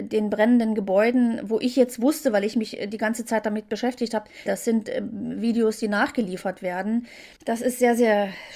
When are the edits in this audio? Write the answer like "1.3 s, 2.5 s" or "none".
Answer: 4.5 s, 7.4 s